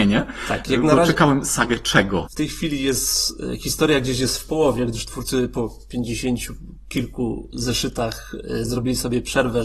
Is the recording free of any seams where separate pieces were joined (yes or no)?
no